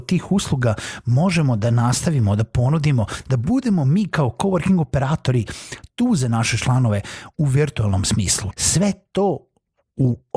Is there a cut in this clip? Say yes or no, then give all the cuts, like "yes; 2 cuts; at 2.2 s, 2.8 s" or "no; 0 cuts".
yes; 1 cut; at 8.5 s